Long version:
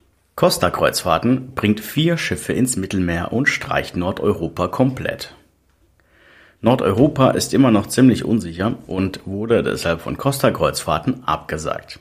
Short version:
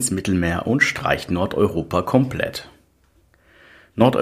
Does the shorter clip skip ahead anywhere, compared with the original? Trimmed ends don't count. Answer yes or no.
no